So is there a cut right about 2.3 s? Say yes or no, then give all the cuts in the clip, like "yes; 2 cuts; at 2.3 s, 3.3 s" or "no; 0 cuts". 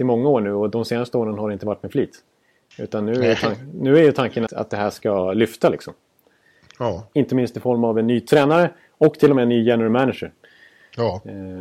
no; 2 cuts; at 4.5 s, 7.1 s